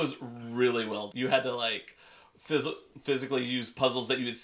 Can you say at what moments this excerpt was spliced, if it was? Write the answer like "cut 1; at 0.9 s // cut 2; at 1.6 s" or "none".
cut 1; at 1.1 s